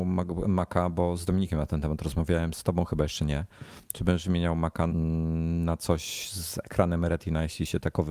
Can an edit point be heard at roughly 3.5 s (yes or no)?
no